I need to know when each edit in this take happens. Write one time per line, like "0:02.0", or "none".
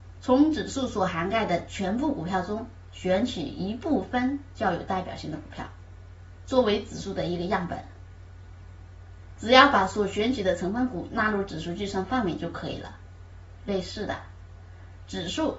0:09.4